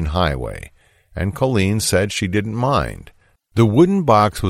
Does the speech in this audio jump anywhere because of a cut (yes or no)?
yes